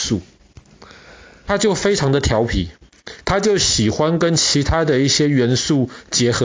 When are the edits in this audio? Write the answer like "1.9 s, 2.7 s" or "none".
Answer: 1.5 s